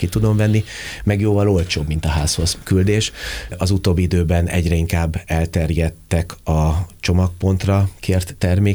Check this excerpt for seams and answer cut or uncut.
cut